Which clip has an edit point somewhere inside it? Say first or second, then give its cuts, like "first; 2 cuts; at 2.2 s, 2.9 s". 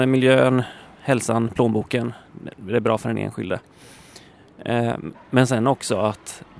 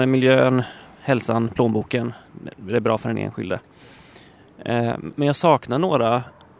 first; 1 cut; at 5.1 s